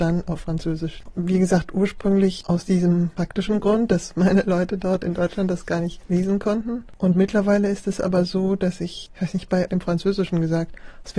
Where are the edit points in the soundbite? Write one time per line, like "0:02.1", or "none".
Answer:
0:01.1
0:09.7